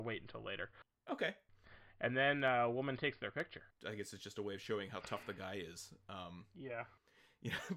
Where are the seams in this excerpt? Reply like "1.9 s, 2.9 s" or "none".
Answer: 3.7 s